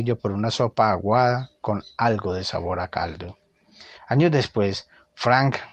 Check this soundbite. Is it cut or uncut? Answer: cut